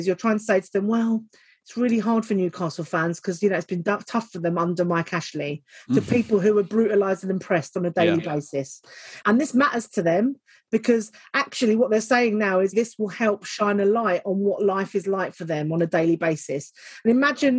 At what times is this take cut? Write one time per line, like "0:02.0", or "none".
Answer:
0:09.2
0:12.7